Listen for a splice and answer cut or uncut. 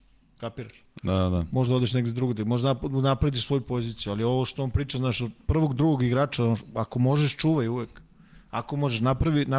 uncut